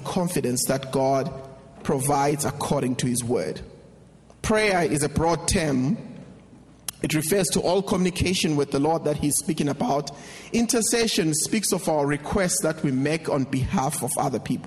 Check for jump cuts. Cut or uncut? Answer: uncut